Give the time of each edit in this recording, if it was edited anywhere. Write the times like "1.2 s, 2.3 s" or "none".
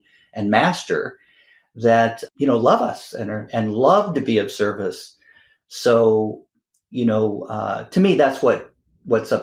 2.3 s